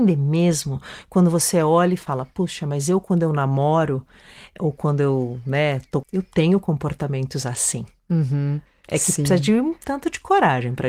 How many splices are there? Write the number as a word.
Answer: one